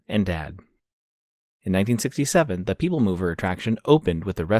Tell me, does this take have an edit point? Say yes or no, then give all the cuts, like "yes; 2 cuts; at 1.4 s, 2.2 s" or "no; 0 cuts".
no; 0 cuts